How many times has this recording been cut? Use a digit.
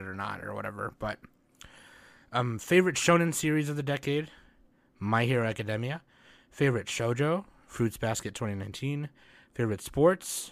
0